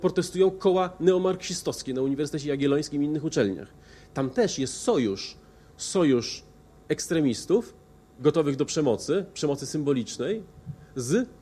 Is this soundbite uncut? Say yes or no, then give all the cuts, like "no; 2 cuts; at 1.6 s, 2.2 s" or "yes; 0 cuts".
yes; 0 cuts